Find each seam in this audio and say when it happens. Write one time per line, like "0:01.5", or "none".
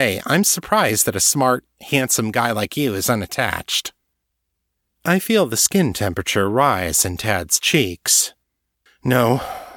none